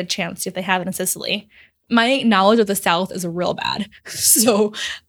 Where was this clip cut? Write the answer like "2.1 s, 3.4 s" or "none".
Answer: none